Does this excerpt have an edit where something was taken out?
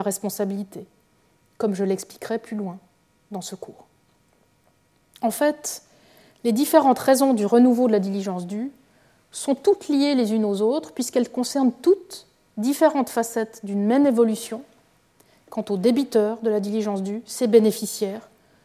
no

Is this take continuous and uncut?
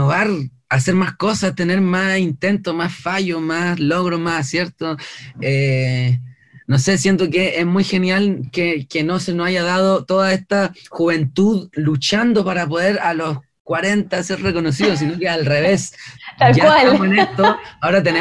yes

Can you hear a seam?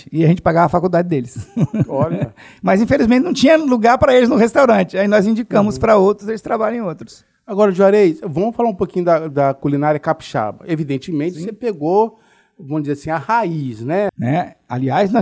yes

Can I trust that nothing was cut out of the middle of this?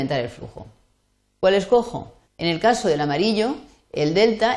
no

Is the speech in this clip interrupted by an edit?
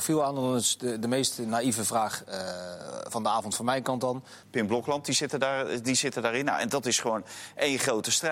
yes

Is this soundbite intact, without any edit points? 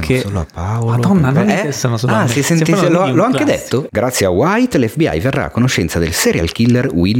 no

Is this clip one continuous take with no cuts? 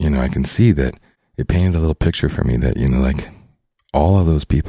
yes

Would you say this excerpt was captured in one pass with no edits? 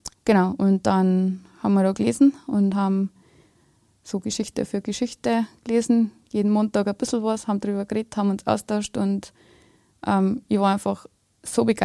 yes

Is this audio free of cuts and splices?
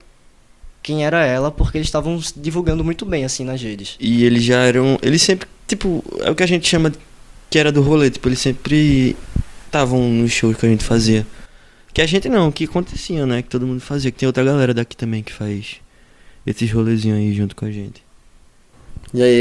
no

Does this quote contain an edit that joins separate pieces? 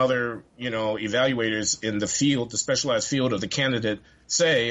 no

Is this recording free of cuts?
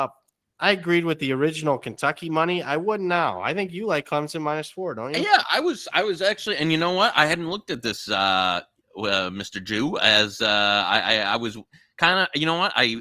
yes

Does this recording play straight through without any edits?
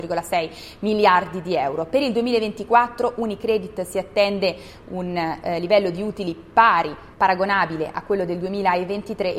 no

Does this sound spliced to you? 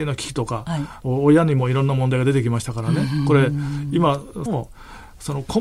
yes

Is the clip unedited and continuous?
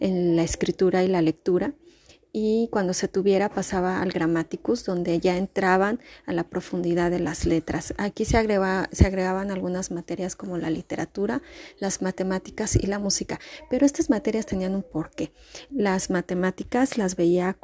yes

